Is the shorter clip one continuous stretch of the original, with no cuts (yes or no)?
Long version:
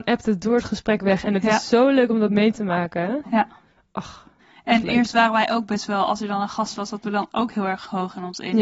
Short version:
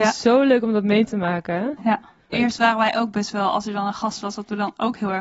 no